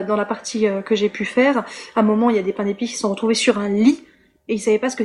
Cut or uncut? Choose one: uncut